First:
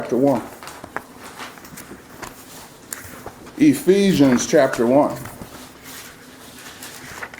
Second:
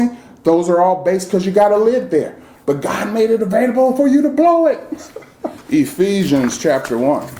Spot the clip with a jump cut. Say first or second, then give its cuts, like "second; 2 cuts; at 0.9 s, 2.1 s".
second; 1 cut; at 5.6 s